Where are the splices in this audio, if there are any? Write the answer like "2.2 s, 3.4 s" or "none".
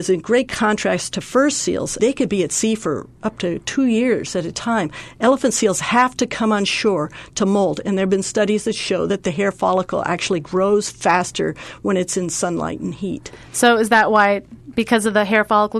2.0 s